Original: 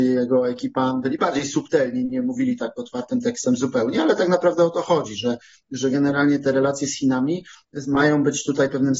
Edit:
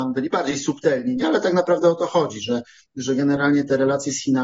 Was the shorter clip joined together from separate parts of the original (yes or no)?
yes